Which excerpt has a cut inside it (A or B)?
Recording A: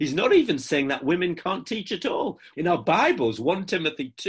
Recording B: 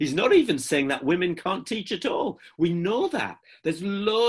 A